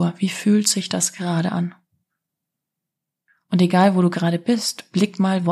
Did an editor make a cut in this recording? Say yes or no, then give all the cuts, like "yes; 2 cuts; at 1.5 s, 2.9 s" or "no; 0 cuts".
no; 0 cuts